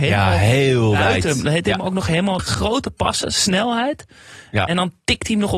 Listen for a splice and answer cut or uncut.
cut